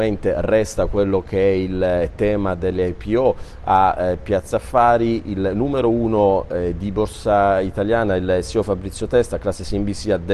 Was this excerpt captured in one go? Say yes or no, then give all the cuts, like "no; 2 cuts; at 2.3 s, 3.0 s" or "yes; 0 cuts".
yes; 0 cuts